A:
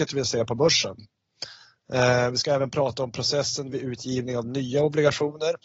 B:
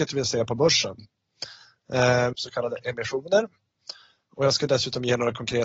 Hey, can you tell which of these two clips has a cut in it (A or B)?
B